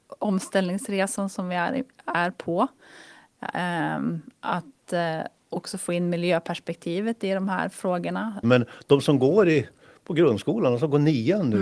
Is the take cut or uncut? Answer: cut